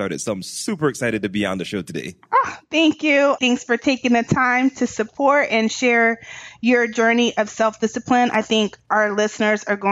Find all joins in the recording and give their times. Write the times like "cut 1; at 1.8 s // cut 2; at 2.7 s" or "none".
cut 1; at 3.4 s